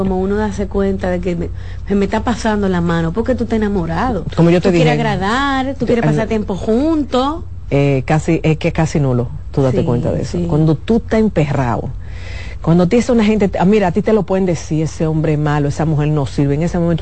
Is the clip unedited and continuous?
yes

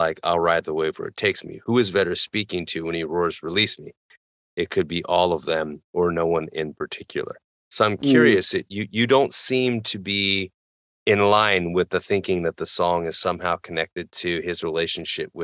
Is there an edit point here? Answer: yes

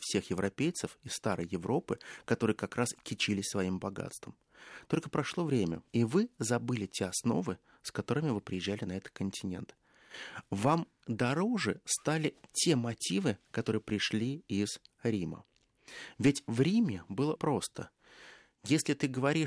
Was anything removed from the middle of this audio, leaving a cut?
yes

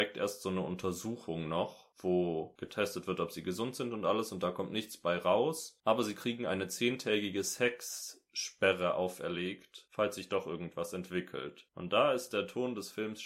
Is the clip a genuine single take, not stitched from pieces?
yes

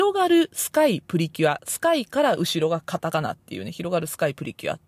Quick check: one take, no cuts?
no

